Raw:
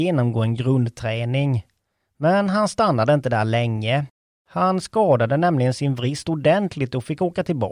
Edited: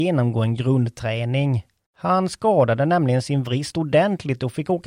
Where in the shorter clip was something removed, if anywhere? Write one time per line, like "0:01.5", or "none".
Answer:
0:01.8